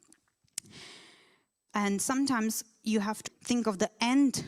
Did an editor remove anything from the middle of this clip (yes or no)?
yes